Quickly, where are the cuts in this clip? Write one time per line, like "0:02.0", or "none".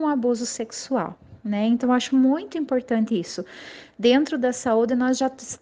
none

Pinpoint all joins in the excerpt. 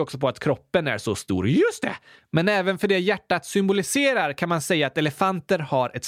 none

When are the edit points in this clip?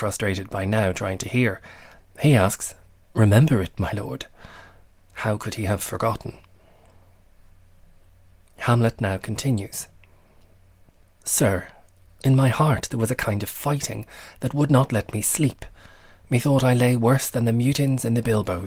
none

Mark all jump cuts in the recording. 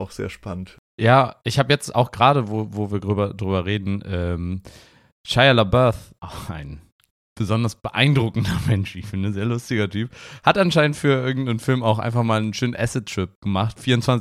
none

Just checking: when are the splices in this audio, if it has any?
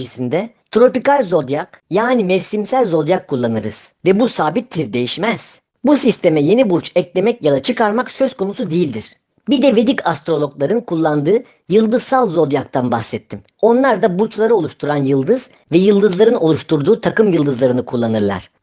0:04.0

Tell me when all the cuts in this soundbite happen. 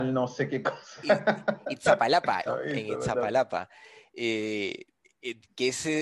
0:02.5

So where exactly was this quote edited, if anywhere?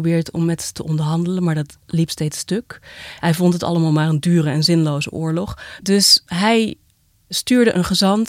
0:03.2

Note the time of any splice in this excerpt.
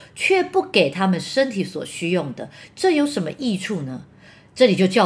none

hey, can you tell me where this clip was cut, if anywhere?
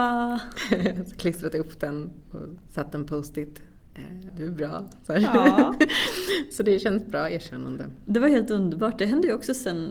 0:04.3

